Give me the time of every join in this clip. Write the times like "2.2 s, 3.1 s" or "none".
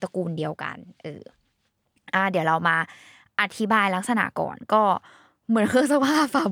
none